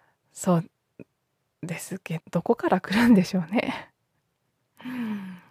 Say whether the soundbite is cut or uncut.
cut